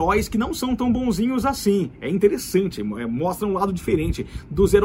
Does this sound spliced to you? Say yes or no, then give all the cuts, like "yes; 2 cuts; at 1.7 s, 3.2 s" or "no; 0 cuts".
no; 0 cuts